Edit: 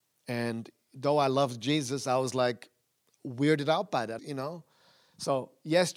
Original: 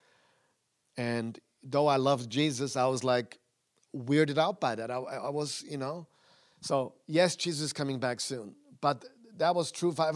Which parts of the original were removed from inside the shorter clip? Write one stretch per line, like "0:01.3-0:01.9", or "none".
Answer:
0:04.9-0:05.6